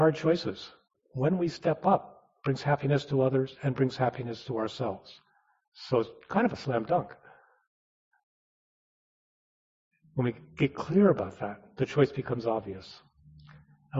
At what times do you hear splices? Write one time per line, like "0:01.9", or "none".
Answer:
0:00.9